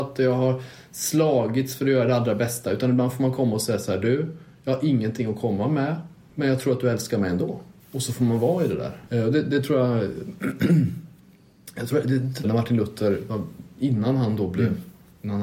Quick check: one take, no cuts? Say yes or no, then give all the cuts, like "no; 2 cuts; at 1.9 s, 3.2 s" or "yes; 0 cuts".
no; 2 cuts; at 7.8 s, 12.4 s